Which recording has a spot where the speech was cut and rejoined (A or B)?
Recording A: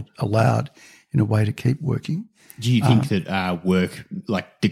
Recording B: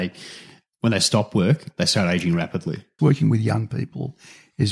B